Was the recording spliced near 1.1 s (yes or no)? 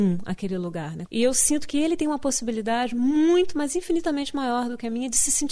yes